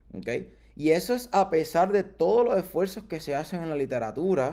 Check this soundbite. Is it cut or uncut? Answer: uncut